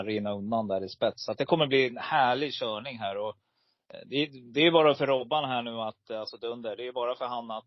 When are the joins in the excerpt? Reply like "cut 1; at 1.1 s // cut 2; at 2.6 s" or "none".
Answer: none